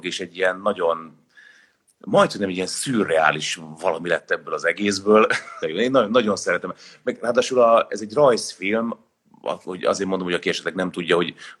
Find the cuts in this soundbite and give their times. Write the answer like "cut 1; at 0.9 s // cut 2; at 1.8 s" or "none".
cut 1; at 5.6 s